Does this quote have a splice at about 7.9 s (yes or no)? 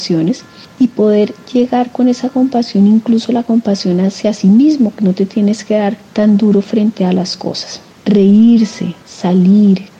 no